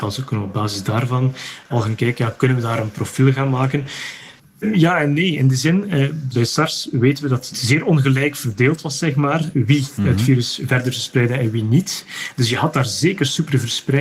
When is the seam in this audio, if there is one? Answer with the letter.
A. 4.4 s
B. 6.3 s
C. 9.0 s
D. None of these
A